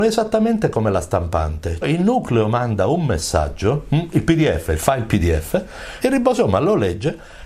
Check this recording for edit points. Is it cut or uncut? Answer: cut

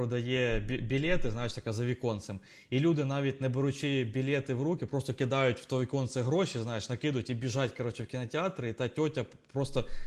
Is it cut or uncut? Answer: uncut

